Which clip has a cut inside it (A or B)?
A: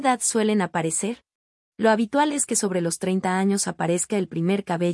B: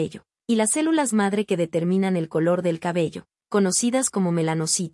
A